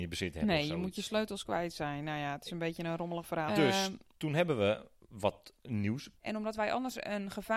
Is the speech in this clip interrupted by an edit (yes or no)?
yes